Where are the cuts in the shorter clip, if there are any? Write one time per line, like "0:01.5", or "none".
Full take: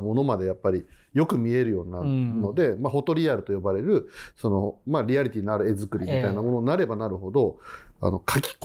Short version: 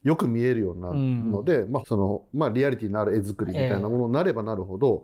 0:01.8